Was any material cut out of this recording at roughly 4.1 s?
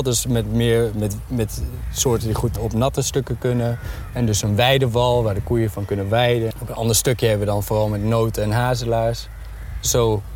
no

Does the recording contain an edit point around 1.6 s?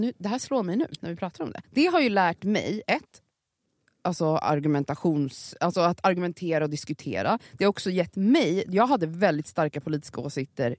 yes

